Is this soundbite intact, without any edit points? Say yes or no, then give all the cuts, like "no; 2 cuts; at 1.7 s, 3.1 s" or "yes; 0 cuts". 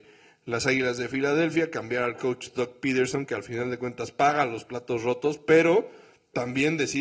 yes; 0 cuts